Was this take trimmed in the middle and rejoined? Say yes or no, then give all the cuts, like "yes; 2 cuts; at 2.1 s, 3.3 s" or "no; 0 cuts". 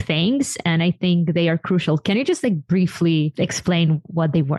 no; 0 cuts